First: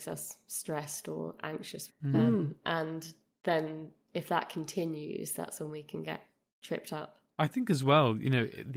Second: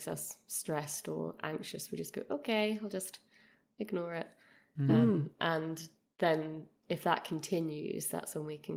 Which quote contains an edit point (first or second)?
first